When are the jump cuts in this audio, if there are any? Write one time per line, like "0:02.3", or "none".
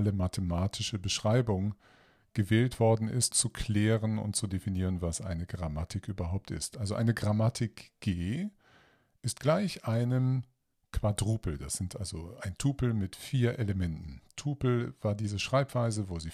0:03.3